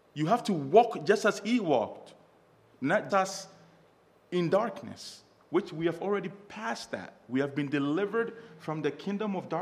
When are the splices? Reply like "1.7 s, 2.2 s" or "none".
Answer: 3.1 s